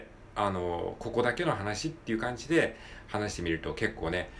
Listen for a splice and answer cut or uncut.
uncut